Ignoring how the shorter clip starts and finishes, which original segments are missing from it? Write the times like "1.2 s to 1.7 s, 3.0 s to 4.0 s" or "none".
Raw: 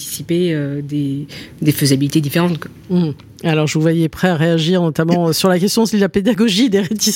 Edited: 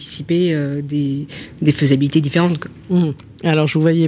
none